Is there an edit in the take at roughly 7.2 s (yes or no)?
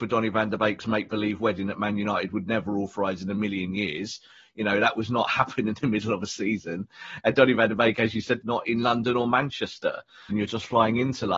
no